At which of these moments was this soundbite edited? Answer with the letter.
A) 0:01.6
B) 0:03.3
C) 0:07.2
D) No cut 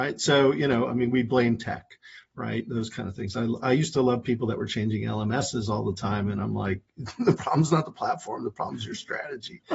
D